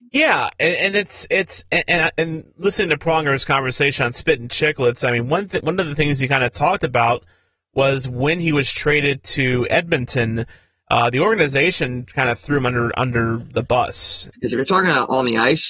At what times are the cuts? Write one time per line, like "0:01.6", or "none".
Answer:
0:14.3